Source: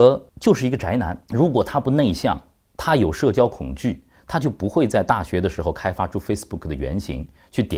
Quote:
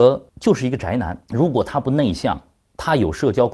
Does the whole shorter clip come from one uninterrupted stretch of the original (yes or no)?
yes